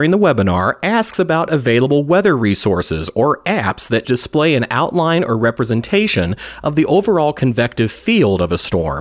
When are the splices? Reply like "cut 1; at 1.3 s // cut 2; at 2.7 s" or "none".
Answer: cut 1; at 4.0 s